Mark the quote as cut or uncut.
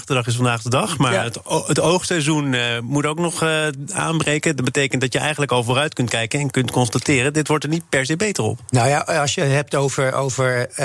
uncut